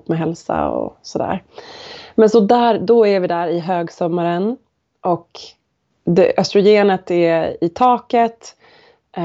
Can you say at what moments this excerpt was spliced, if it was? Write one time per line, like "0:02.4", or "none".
0:05.9